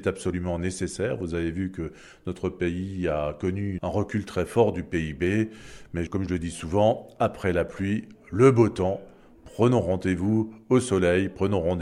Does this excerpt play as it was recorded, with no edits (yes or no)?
yes